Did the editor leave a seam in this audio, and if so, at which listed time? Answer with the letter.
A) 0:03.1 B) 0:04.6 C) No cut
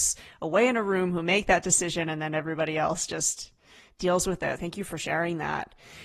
B